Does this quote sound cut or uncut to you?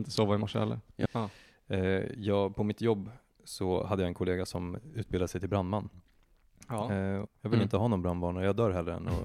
cut